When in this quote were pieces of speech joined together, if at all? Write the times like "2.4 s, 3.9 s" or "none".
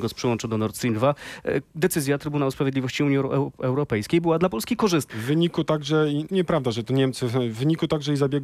5.1 s, 6.3 s